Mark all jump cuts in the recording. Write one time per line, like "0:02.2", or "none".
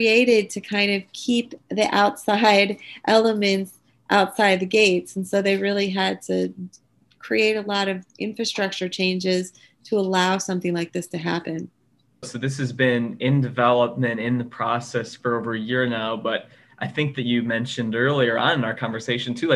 0:12.2